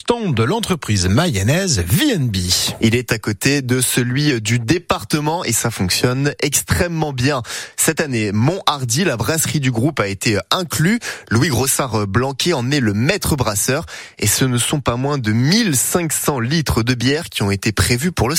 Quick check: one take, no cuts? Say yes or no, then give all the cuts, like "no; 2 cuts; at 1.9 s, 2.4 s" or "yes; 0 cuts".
yes; 0 cuts